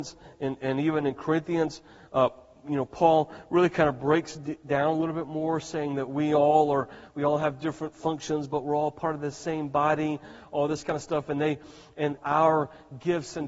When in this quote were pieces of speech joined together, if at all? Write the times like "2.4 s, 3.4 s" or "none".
7.1 s, 12.2 s